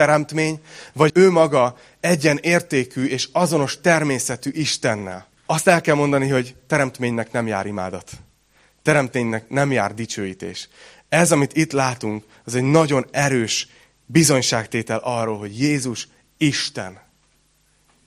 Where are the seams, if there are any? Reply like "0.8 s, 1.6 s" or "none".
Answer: 1.1 s, 5.4 s